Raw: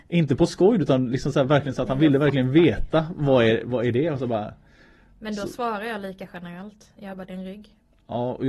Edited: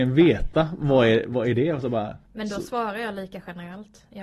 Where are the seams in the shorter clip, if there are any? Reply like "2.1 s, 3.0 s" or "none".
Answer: 2.2 s